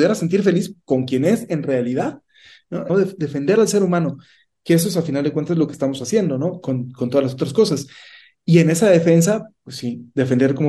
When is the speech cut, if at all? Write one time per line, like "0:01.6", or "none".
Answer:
0:02.9